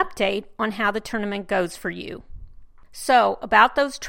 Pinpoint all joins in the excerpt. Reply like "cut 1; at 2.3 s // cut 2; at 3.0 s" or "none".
cut 1; at 2.8 s